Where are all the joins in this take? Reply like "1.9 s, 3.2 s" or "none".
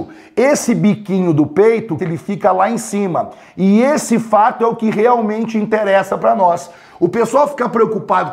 2.0 s